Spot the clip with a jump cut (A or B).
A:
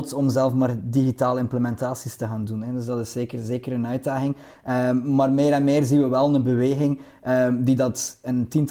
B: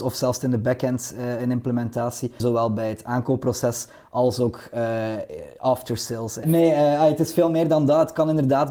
B